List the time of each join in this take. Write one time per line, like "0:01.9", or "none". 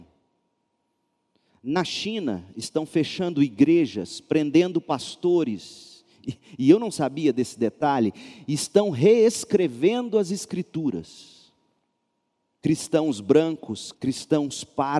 0:12.6
0:13.9